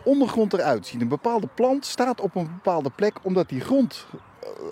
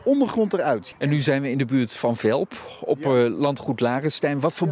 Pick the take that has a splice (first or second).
second